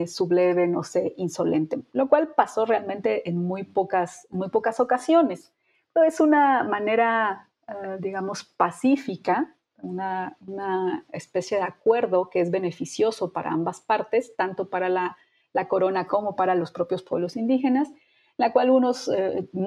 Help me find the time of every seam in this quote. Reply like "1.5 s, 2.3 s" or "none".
none